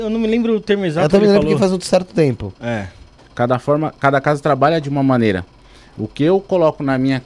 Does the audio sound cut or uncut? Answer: cut